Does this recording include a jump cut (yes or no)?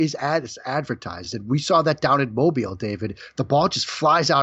no